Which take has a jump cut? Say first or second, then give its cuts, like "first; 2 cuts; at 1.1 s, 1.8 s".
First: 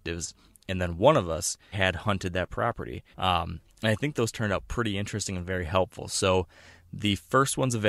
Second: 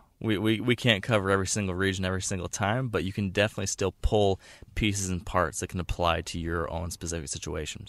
first; 2 cuts; at 1.7 s, 3.1 s